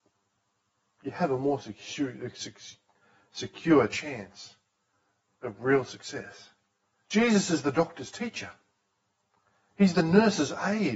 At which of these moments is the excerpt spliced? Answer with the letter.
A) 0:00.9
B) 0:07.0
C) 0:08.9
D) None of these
B